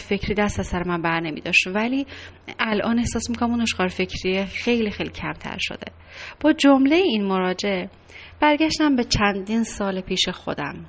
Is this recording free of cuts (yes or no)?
yes